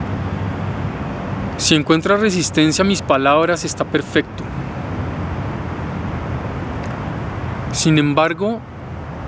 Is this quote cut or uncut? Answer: uncut